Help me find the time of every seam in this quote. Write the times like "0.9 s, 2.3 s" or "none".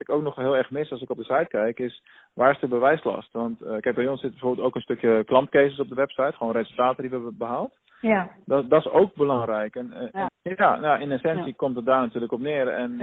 10.3 s